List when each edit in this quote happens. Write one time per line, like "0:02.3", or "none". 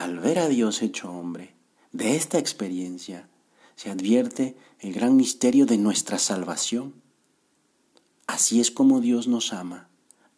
none